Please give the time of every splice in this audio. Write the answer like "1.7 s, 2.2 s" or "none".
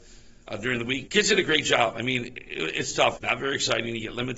1.1 s, 3.2 s